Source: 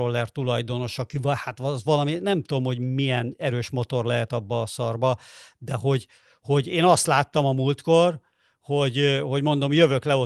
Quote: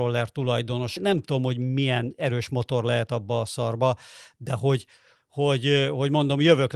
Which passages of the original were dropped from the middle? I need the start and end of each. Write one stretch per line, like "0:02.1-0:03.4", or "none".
0:01.0-0:02.2
0:06.4-0:08.5